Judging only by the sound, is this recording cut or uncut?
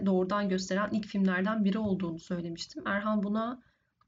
uncut